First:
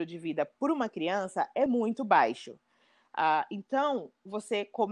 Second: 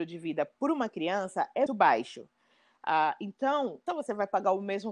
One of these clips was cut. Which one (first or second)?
second